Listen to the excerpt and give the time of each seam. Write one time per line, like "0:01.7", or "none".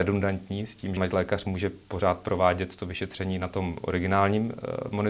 0:01.0

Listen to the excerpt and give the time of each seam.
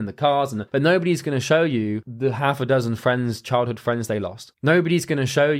0:04.5

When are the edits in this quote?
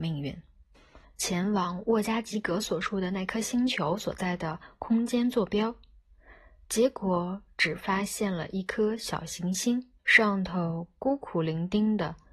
0:01.0
0:10.0

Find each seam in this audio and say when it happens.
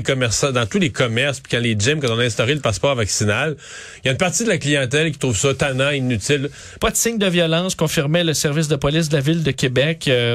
0:06.8

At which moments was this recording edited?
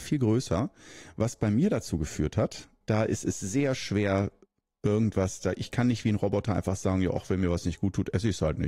0:02.8

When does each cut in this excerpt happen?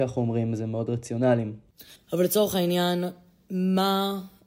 0:02.0

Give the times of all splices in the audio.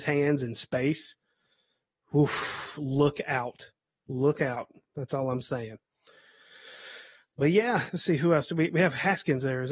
0:07.9

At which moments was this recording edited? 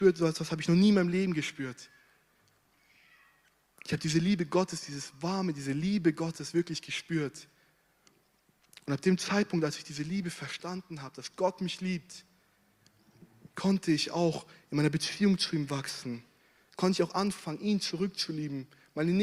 none

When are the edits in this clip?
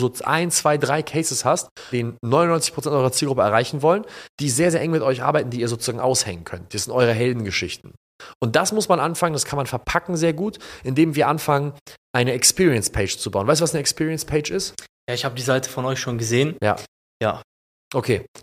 0:01.9

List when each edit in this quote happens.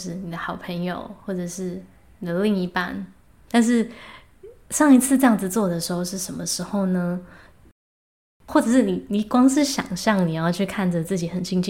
0:03.5

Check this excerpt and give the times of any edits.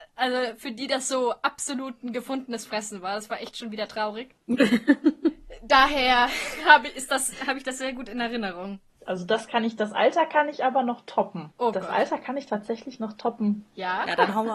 none

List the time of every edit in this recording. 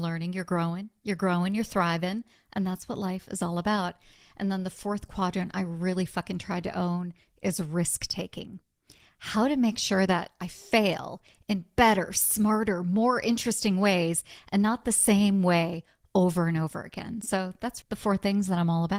0:17.8

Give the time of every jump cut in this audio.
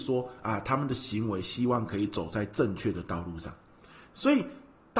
none

